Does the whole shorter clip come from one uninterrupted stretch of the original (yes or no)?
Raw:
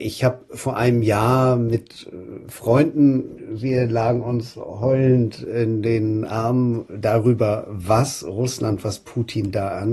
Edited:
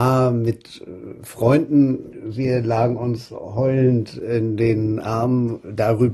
yes